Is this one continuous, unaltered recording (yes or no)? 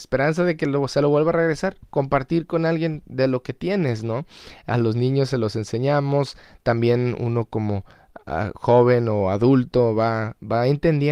yes